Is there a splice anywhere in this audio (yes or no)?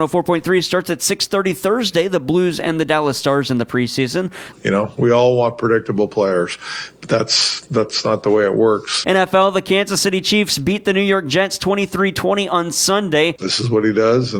yes